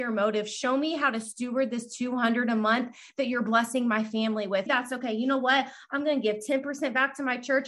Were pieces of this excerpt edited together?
yes; 1 cut; at 4.7 s

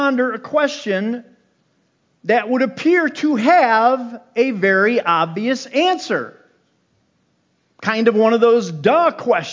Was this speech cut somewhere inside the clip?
no; 0 cuts

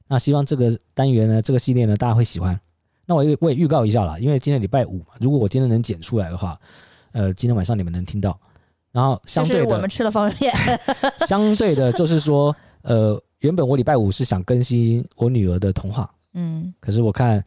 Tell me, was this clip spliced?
no; 0 cuts

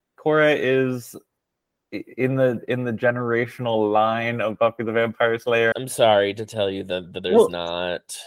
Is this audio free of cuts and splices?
no; 1 cut; at 5.7 s

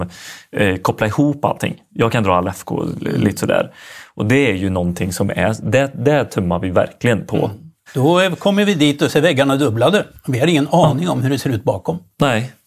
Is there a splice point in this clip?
yes; 1 cut; at 7.9 s

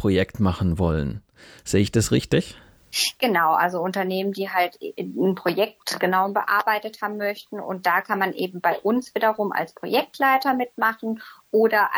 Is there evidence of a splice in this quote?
no; 0 cuts

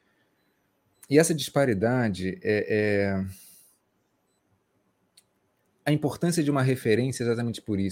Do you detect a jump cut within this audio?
no; 0 cuts

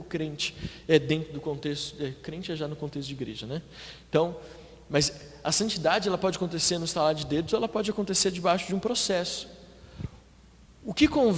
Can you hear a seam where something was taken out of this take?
no; 0 cuts

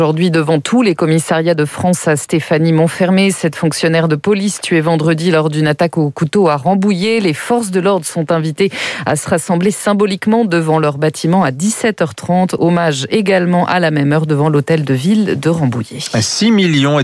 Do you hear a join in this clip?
no; 0 cuts

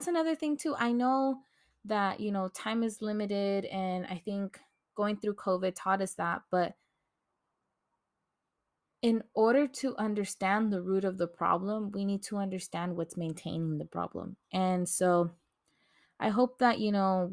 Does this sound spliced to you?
no; 0 cuts

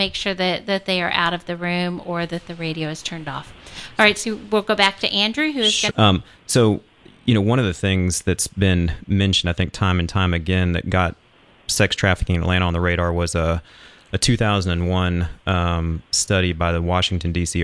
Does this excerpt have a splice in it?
yes; 1 cut; at 5.9 s

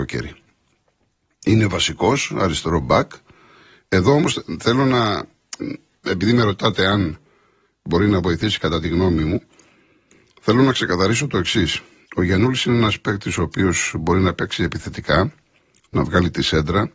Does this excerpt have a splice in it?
no; 0 cuts

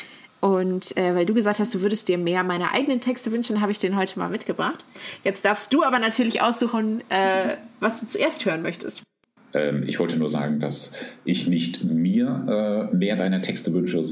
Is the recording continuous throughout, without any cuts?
yes; 0 cuts

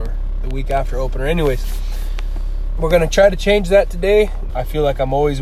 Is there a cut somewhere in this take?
yes; 2 cuts; at 2.8 s, 4.5 s

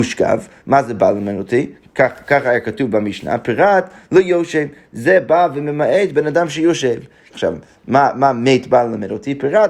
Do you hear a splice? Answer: yes; 1 cut; at 7.3 s

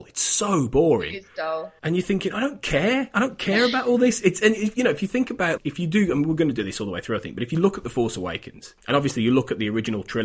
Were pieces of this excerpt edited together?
yes; 1 cut; at 5.6 s

